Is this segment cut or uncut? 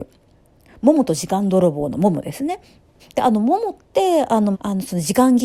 cut